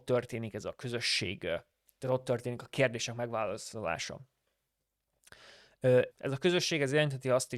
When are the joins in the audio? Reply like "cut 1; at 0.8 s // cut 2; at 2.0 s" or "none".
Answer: cut 1; at 6.1 s